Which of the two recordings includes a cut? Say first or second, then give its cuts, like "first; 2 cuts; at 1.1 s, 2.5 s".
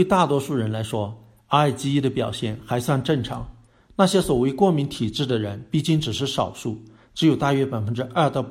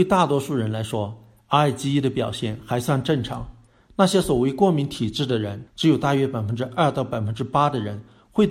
second; 1 cut; at 5.7 s